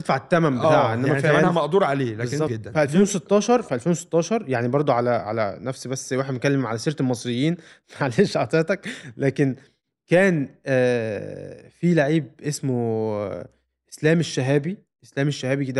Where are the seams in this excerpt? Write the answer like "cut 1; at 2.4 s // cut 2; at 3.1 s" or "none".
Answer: cut 1; at 2.5 s

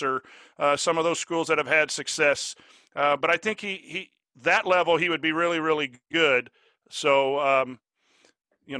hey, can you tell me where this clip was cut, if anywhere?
none

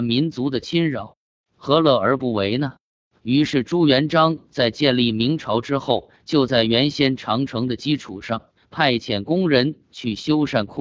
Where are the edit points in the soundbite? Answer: cut 1; at 3.2 s

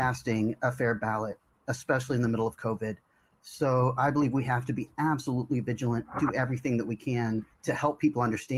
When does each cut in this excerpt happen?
cut 1; at 7.5 s

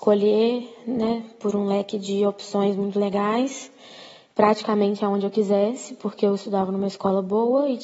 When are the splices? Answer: none

